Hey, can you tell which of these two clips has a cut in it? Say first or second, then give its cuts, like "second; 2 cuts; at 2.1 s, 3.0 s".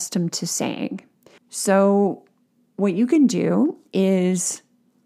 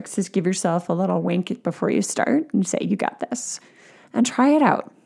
first; 1 cut; at 1.4 s